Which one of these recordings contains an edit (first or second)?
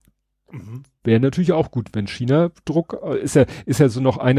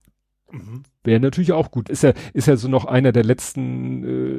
second